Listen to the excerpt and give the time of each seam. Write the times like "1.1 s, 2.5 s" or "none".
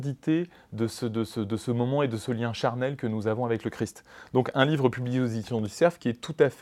none

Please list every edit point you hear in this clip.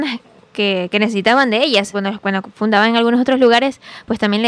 1.9 s

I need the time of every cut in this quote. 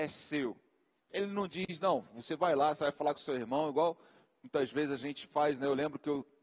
1.0 s

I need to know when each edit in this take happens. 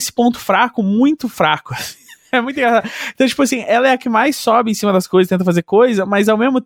none

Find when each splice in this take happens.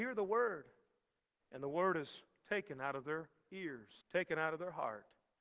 4.0 s

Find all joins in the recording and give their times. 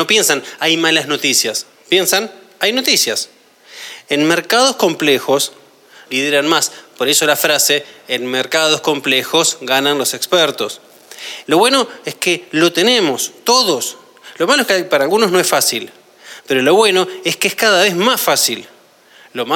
6.1 s, 11.4 s

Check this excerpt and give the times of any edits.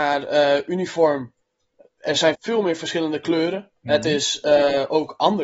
2.3 s

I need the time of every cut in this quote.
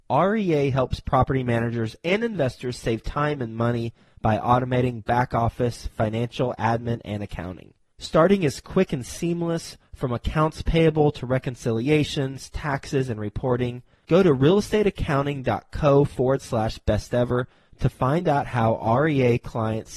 none

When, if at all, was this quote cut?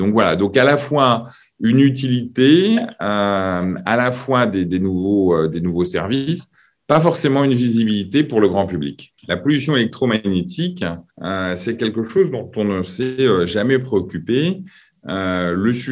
9.2 s, 11.1 s

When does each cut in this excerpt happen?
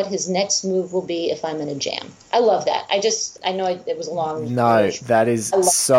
3.4 s

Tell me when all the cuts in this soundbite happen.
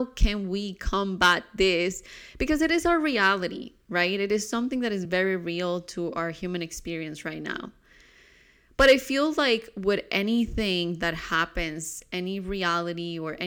none

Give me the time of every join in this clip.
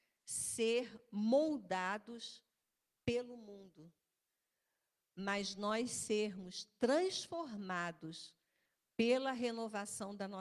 none

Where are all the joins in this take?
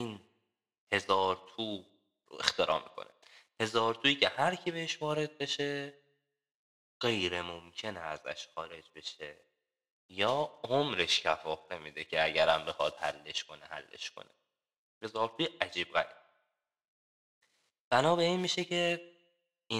none

